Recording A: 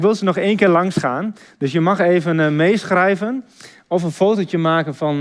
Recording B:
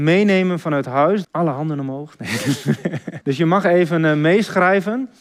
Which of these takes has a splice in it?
B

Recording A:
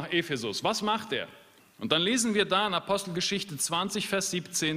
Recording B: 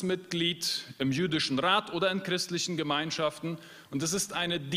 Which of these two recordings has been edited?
A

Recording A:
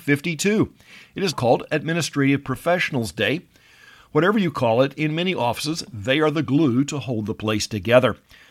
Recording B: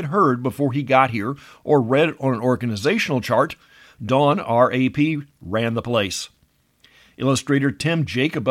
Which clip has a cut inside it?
A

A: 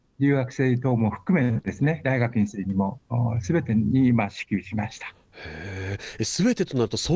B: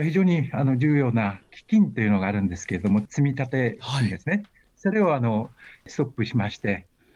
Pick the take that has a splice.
A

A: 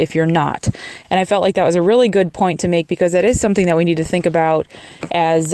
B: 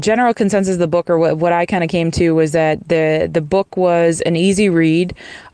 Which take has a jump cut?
A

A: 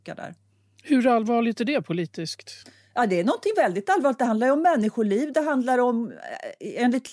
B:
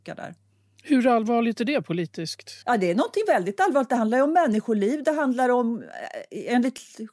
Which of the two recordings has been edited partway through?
B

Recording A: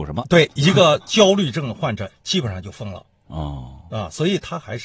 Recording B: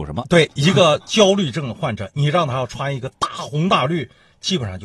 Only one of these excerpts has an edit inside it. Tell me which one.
A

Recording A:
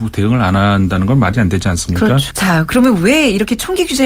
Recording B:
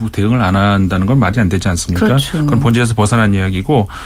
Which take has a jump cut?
A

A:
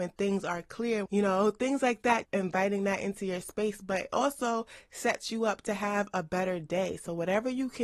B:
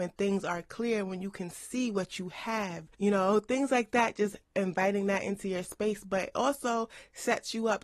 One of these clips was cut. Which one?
A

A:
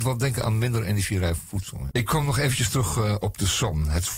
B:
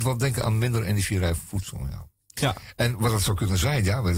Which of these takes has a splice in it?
A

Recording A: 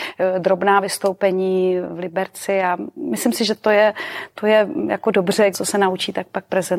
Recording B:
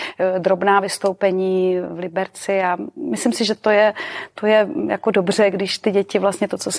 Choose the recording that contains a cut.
A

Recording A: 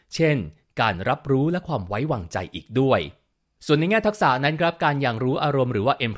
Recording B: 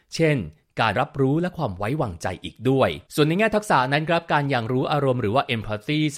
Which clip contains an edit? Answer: B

